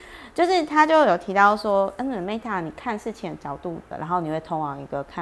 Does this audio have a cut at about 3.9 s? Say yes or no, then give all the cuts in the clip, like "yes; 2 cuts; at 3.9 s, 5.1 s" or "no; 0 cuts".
yes; 1 cut; at 3.9 s